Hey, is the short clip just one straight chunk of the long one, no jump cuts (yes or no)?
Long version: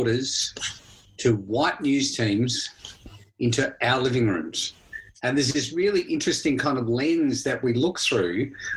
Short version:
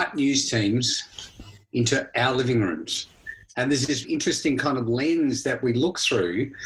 no